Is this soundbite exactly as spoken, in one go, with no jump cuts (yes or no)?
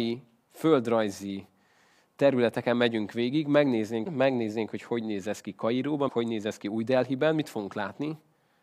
no